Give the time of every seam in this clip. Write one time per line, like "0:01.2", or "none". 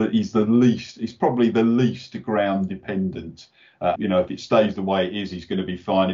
0:04.0